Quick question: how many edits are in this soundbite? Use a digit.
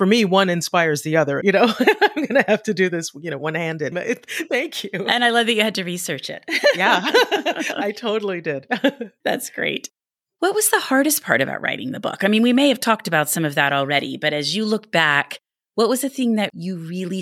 2